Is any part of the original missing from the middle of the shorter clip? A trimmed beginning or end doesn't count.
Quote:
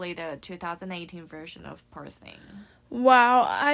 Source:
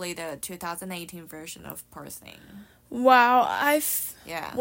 no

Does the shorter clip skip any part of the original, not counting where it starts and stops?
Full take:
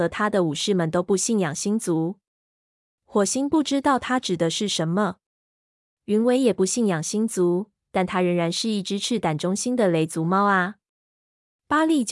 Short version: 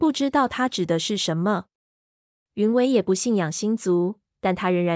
no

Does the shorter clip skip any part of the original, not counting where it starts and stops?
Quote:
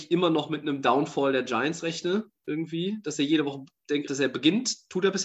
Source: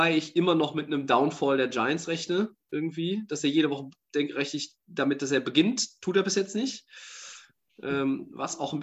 yes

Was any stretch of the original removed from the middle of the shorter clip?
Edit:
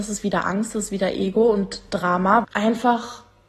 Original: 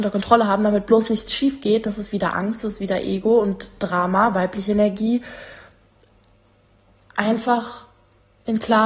yes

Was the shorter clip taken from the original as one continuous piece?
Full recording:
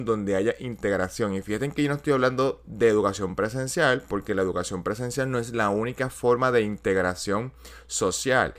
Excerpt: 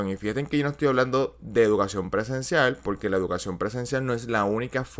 yes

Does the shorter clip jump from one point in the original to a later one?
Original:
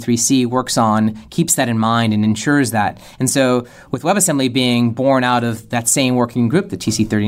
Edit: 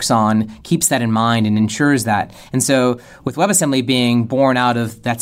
no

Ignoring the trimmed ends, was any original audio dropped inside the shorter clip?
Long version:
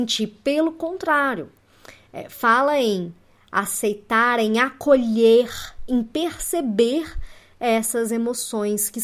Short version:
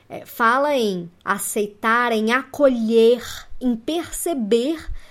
yes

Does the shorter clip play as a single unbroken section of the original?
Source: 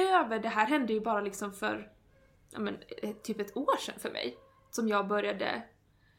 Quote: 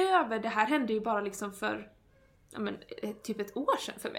yes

